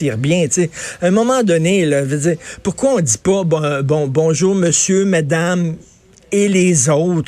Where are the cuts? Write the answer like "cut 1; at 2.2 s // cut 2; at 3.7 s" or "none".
none